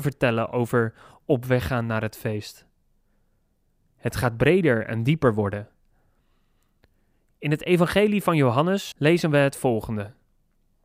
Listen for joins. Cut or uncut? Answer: cut